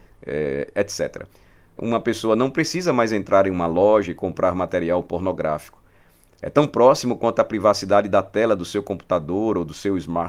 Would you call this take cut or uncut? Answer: cut